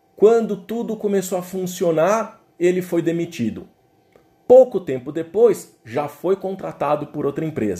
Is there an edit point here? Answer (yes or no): no